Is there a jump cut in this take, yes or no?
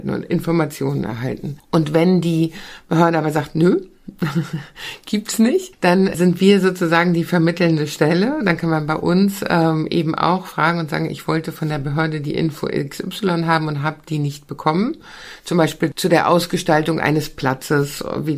no